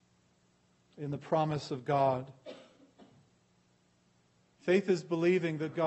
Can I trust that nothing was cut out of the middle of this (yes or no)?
no